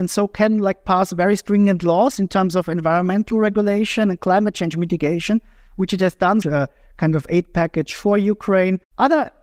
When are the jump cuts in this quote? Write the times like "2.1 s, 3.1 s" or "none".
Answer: 6.4 s